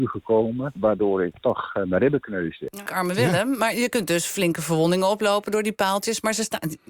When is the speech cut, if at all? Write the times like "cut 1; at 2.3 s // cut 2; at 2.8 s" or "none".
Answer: cut 1; at 2.9 s